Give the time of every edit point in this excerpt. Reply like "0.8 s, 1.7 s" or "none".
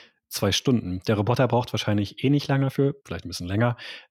3.0 s